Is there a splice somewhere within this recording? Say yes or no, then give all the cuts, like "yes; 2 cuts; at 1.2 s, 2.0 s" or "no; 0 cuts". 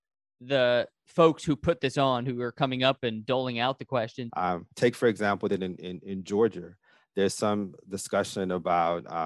yes; 1 cut; at 4.3 s